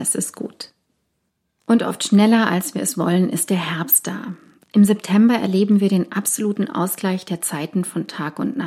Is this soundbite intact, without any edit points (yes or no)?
yes